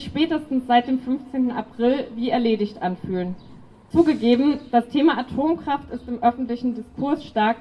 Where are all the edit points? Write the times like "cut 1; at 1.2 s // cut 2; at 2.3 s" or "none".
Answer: cut 1; at 3.9 s